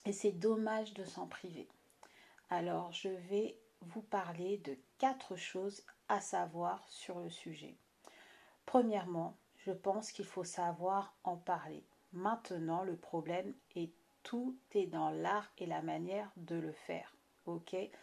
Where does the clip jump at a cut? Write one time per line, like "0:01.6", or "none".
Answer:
none